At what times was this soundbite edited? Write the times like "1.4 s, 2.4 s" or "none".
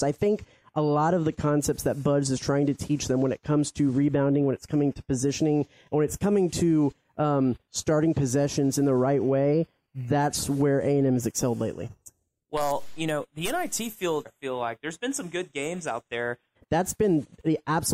14.2 s, 16.5 s